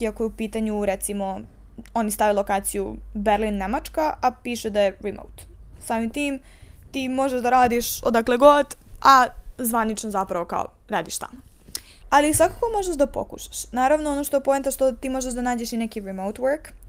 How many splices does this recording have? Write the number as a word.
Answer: one